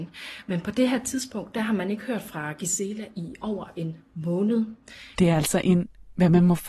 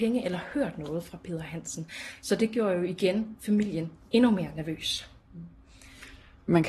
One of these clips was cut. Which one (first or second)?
first